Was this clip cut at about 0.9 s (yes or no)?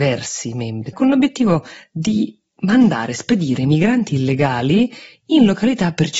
yes